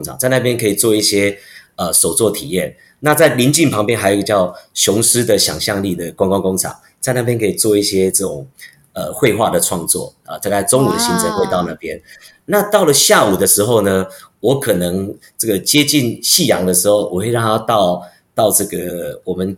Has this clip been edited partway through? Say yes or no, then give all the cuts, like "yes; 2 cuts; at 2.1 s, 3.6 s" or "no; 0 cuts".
no; 0 cuts